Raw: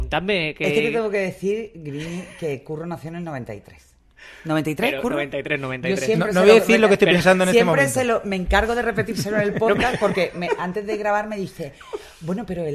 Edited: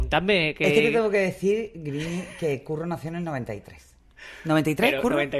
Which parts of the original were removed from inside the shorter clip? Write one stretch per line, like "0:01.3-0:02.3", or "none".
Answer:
none